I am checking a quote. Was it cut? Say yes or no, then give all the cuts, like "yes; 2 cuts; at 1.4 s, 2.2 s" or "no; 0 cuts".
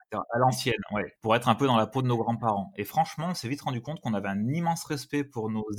no; 0 cuts